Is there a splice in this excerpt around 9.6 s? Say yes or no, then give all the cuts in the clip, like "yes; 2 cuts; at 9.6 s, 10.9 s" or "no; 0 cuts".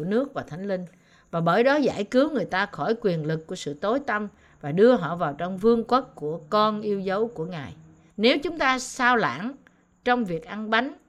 no; 1 cut; at 8.1 s